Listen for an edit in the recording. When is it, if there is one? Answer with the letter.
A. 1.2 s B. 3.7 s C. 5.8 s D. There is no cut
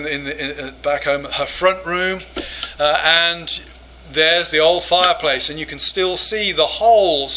D